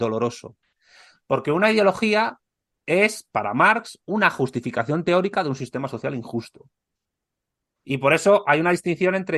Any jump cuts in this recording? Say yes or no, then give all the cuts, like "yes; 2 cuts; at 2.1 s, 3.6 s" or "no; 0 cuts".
no; 0 cuts